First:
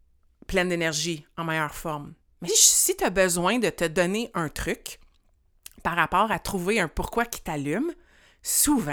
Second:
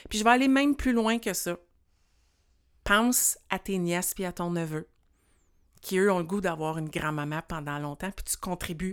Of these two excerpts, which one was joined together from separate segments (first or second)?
first